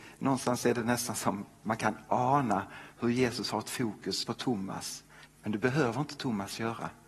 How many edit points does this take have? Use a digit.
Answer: 2